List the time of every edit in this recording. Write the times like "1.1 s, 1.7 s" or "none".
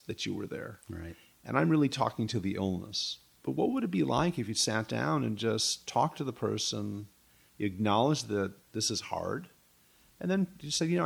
1.3 s

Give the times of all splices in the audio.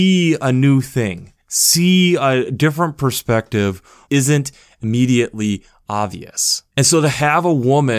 4.0 s, 6.7 s

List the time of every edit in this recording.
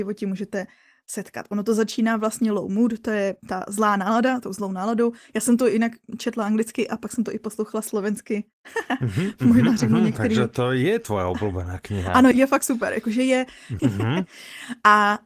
12.3 s, 13.8 s

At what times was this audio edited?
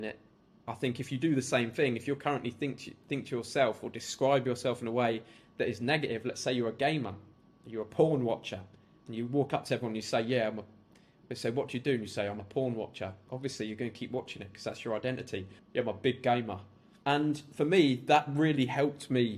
15.6 s, 17.0 s

